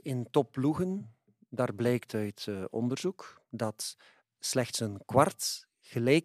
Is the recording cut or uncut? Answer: uncut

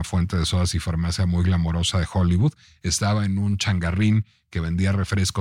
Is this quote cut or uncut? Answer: uncut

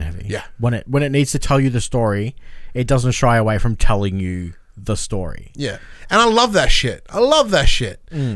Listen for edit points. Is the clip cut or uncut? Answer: uncut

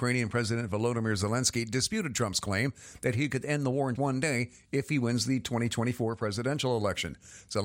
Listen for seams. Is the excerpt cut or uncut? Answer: cut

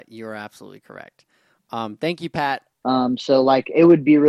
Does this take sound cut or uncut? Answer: cut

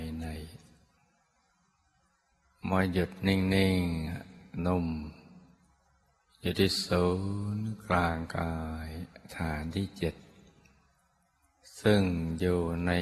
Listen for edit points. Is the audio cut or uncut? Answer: cut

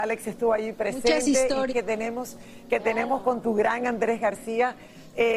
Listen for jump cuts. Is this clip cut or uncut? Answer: cut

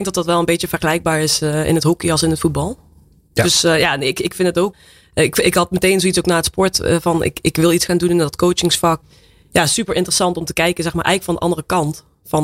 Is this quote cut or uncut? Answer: uncut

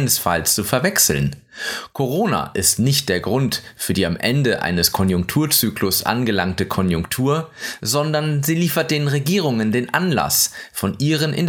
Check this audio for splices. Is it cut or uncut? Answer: uncut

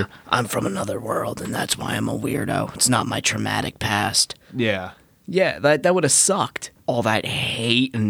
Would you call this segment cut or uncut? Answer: cut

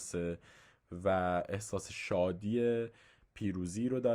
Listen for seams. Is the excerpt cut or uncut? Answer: uncut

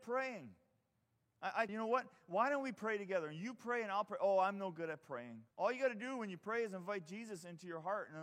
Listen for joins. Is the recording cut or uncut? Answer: cut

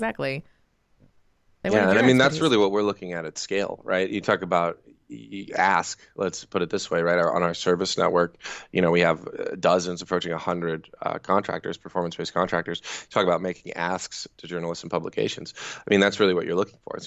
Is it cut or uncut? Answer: uncut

